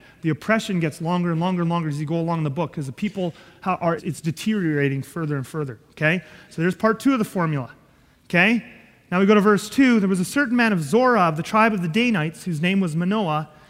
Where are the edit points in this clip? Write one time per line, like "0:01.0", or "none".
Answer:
0:04.0